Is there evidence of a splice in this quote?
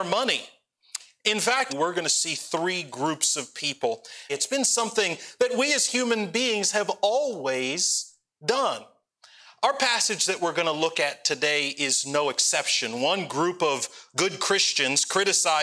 yes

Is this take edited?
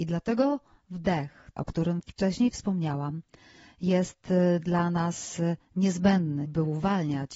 yes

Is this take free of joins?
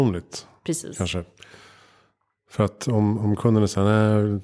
yes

